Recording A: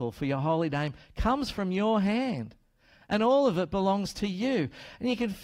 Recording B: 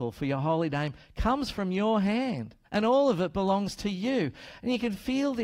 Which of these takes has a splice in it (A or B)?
B